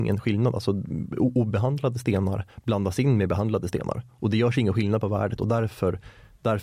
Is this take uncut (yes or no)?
yes